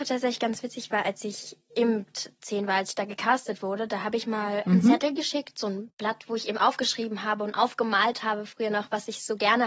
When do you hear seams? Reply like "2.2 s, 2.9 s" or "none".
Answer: none

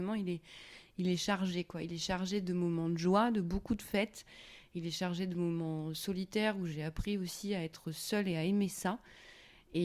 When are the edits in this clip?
none

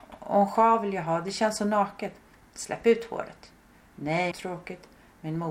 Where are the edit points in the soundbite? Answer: 4.3 s

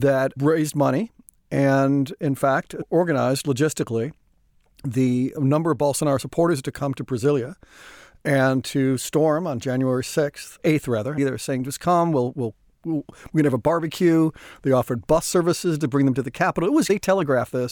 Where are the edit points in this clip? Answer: 11.2 s

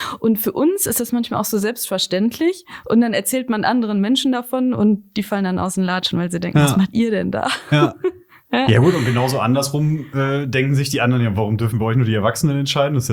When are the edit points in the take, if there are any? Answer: none

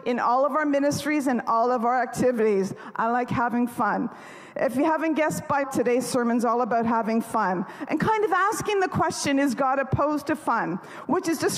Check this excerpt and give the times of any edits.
5.6 s

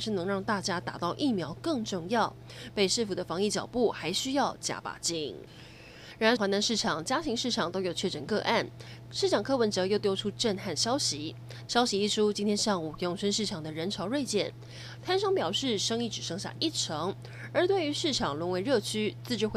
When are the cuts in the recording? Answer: 6.4 s, 11.7 s

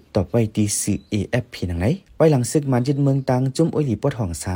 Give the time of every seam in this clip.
none

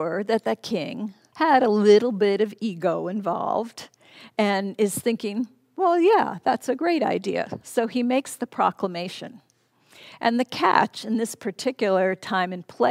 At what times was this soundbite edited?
1.3 s

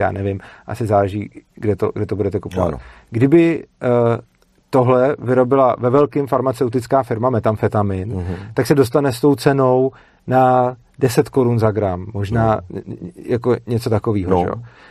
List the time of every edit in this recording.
none

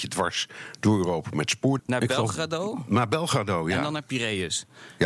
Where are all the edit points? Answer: 1.8 s

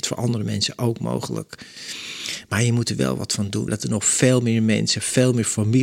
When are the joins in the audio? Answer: 3.7 s

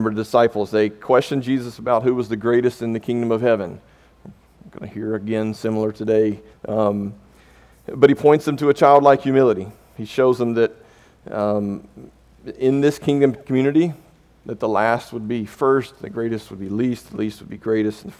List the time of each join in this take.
6.5 s

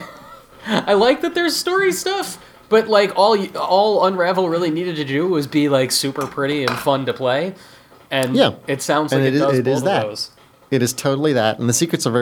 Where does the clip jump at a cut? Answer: none

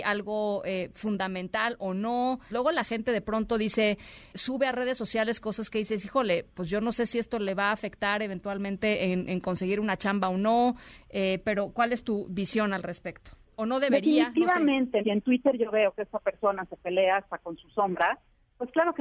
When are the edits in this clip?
2.5 s, 4.3 s, 15.0 s

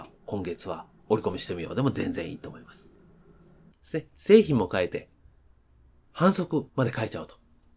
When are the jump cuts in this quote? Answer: 3.7 s

